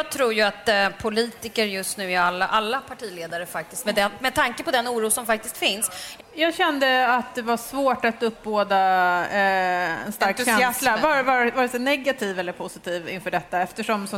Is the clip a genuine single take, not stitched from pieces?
no; 2 cuts; at 3.8 s, 6.2 s

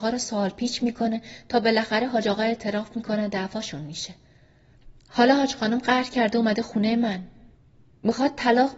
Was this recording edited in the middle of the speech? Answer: no; 0 cuts

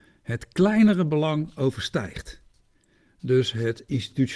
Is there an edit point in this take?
no; 0 cuts

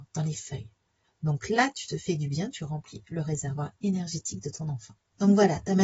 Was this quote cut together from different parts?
yes; 2 cuts; at 1.0 s, 2.5 s

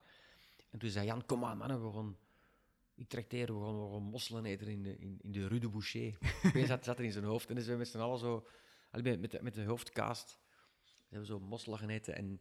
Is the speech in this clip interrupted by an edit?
no; 0 cuts

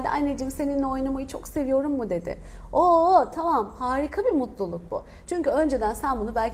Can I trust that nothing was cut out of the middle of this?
yes; 0 cuts

